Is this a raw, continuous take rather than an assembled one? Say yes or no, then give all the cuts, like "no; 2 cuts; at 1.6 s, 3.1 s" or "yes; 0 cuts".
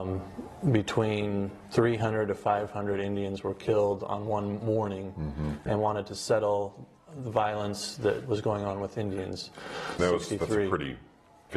no; 2 cuts; at 5.7 s, 10.0 s